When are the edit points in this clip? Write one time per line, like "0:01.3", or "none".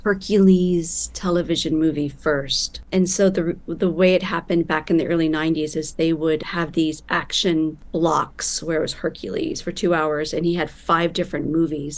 none